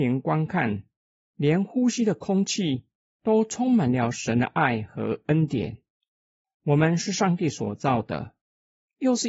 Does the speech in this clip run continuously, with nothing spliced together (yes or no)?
yes